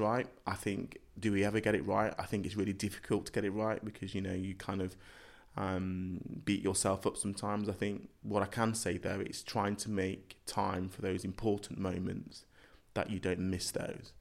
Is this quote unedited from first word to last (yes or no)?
yes